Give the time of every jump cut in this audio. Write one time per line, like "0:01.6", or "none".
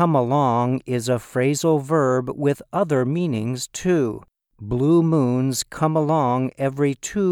0:04.5